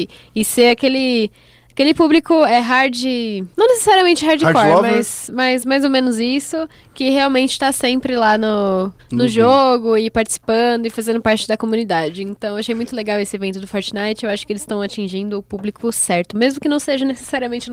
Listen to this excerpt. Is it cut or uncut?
uncut